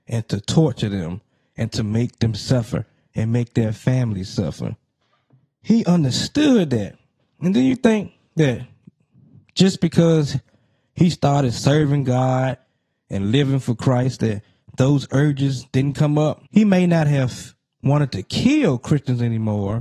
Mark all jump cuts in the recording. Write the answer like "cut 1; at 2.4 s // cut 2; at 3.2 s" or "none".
cut 1; at 16.5 s